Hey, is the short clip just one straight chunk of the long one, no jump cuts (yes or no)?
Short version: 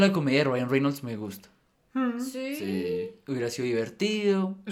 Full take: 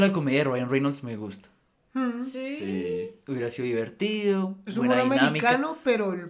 yes